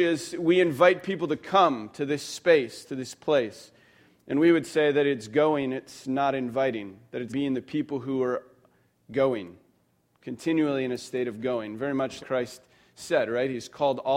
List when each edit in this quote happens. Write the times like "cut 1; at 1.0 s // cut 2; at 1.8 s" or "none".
cut 1; at 7.3 s // cut 2; at 12.2 s